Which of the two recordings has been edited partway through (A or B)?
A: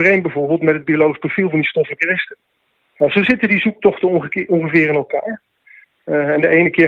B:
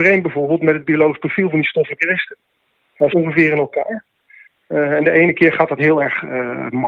B